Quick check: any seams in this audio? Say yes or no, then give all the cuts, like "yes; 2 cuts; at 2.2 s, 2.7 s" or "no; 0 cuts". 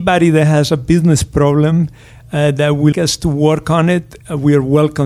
yes; 1 cut; at 2.9 s